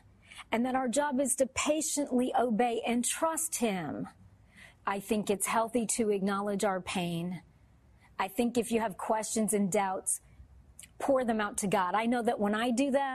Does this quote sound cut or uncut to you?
cut